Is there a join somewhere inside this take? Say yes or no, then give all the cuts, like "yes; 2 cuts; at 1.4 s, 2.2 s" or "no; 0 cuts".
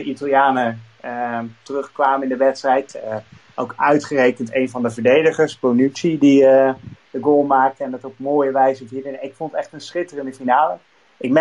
no; 0 cuts